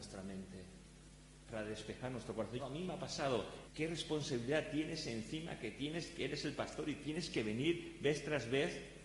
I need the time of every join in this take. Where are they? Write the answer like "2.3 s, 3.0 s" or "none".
2.6 s, 3.7 s